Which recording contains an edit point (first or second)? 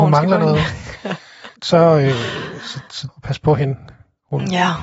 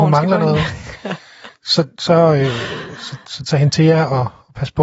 first